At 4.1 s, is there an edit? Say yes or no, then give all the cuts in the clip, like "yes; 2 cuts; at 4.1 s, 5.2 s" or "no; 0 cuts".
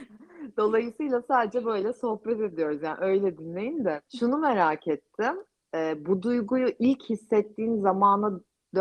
yes; 1 cut; at 4.1 s